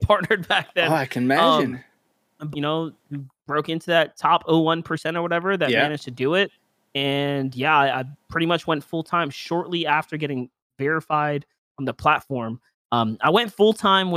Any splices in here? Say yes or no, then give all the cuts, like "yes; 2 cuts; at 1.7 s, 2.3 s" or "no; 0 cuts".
yes; 1 cut; at 2.5 s